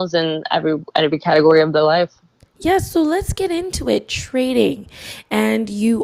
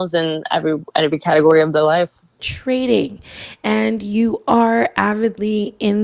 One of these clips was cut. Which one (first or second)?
second